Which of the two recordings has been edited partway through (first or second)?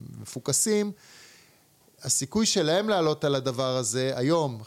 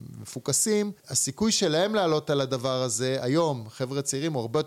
second